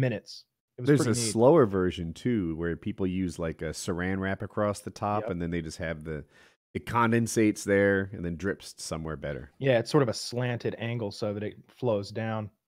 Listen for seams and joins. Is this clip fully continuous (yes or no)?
yes